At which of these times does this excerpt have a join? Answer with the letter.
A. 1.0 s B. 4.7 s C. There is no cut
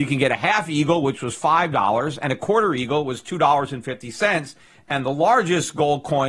C